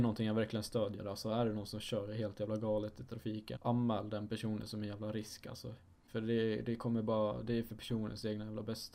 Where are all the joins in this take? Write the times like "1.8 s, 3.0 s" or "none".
none